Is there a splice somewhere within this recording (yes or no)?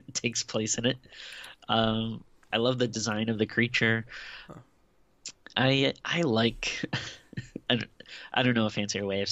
yes